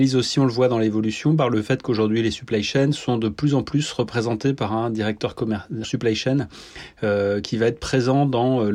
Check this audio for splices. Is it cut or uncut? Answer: cut